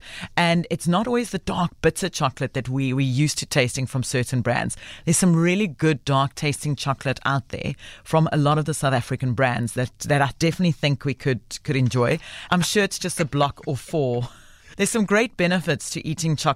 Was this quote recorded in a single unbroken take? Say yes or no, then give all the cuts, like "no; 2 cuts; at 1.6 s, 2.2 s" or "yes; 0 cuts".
no; 2 cuts; at 12.5 s, 14.7 s